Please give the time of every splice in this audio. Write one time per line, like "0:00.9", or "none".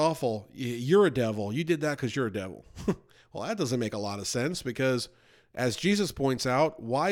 none